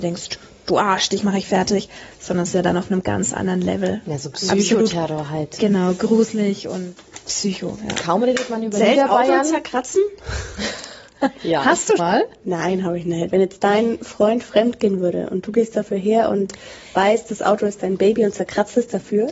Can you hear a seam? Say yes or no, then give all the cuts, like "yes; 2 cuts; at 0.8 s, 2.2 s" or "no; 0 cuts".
yes; 2 cuts; at 12.0 s, 13.3 s